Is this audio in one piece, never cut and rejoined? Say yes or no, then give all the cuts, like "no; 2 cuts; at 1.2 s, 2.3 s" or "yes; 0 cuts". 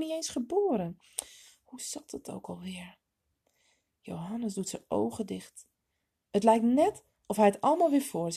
yes; 0 cuts